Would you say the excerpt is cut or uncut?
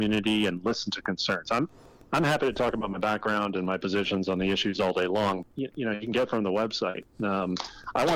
cut